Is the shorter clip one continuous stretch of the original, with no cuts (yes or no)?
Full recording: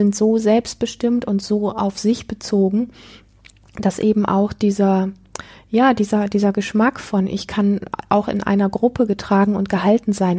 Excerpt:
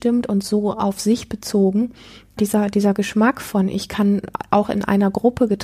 no